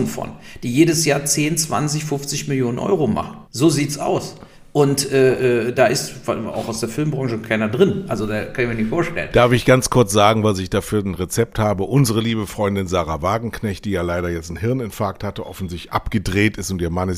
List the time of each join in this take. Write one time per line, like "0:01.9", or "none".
0:03.4